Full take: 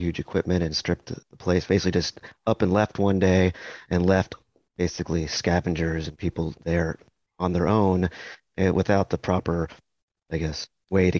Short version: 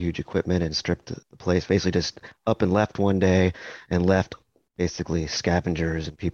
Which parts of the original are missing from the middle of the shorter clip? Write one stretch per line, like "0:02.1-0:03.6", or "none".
none